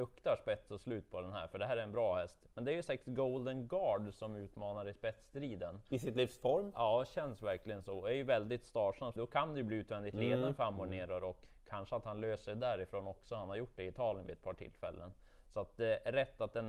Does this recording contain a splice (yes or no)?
yes